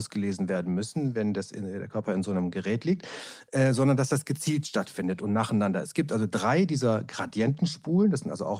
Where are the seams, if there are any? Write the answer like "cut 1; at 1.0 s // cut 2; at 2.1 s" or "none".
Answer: none